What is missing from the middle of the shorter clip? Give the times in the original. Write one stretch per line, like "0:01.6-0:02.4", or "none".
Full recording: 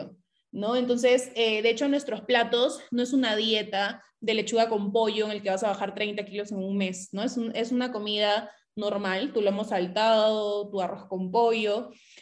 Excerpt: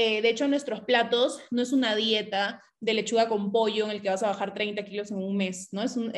none